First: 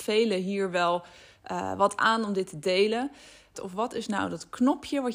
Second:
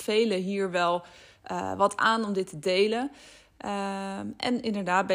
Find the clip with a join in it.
first; 1 cut; at 3.5 s

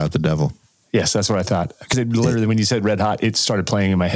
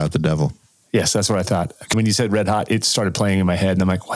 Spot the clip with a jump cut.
second; 1 cut; at 1.9 s

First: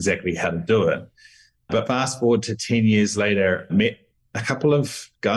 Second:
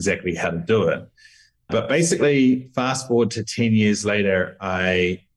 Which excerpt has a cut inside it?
first; 2 cuts; at 1.8 s, 3.7 s

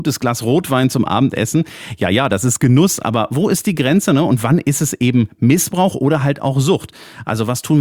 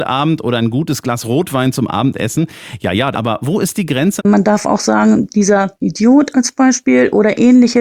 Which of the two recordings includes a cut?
second; 2 cuts; at 3.1 s, 4.2 s

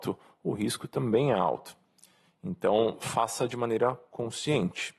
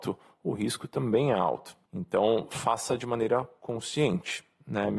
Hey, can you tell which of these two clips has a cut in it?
second; 1 cut; at 1.9 s

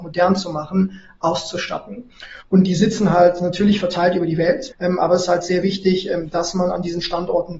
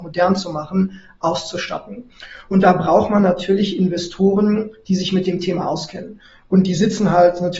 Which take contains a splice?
first; 2 cuts; at 2.4 s, 4.7 s

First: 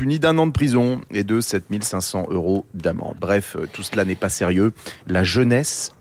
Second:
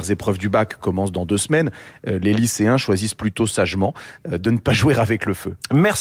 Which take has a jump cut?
first; 2 cuts; at 3.2 s, 5.0 s

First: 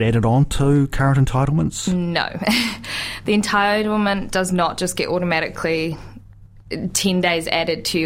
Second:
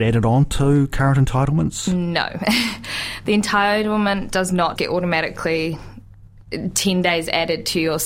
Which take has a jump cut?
second; 1 cut; at 4.8 s

